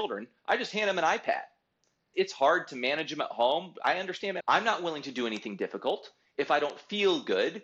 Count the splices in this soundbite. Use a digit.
2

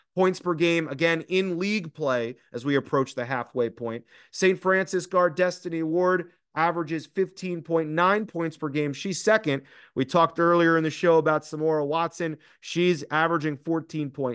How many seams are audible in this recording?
0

